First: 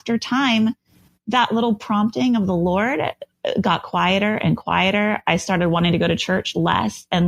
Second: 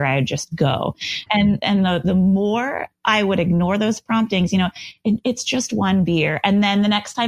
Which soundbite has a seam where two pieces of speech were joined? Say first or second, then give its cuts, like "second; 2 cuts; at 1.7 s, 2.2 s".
second; 1 cut; at 1.3 s